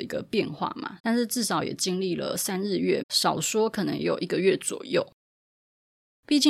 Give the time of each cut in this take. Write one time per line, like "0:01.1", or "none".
0:01.0
0:03.0